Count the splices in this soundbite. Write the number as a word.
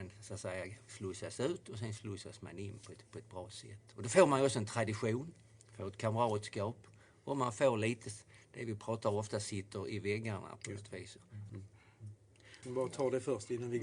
two